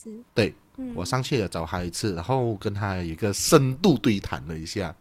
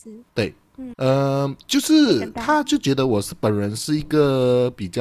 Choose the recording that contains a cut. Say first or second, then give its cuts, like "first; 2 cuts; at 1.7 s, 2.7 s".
second; 1 cut; at 0.9 s